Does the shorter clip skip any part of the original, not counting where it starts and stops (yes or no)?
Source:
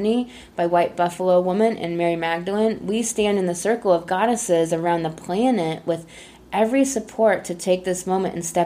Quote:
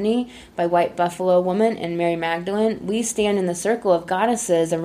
no